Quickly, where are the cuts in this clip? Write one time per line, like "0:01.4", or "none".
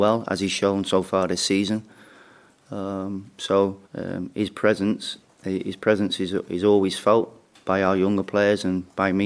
0:03.9
0:05.2

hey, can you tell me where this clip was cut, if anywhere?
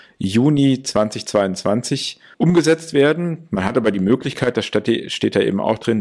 0:02.3

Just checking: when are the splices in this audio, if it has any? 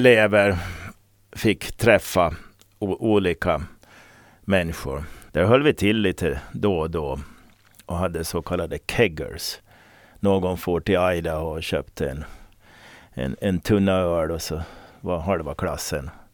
0:05.3

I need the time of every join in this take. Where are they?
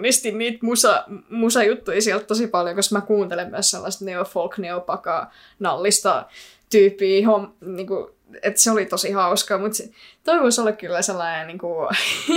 none

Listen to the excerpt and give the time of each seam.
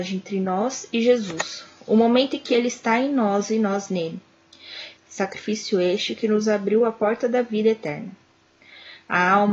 0:05.0

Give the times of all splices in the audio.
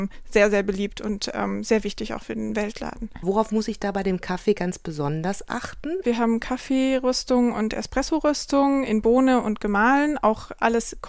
0:06.0

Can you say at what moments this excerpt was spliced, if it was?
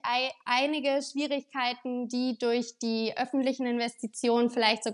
none

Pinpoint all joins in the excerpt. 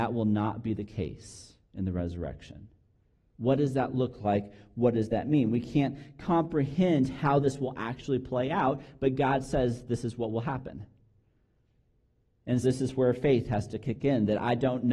0:03.3
0:12.6

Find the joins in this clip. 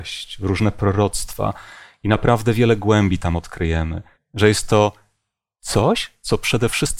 0:04.1

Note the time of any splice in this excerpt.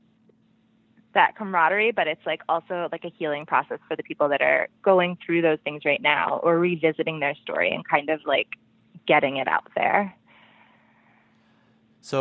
none

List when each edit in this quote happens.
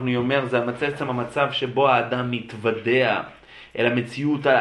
none

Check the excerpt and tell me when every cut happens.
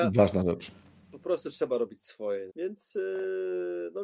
0:02.5

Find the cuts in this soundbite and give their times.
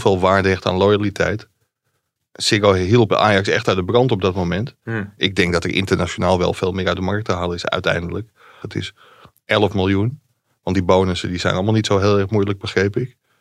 0:02.2
0:05.2
0:08.6

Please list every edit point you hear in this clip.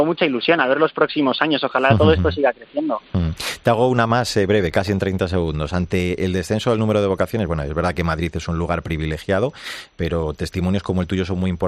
none

